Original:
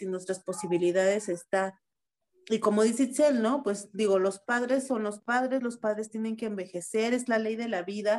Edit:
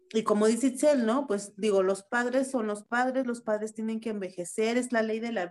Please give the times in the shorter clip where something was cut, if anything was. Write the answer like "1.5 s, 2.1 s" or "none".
none